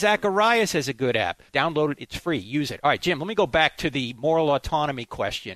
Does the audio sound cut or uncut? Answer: cut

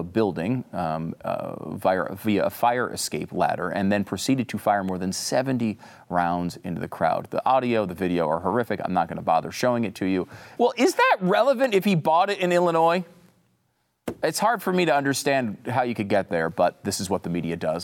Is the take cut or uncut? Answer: cut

